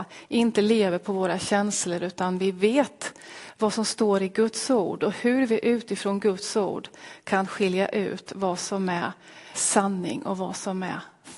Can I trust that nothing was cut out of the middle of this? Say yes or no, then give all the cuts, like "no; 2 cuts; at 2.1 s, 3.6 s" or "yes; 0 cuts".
no; 1 cut; at 9.5 s